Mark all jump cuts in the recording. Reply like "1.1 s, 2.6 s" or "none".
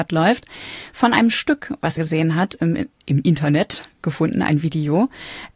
2.0 s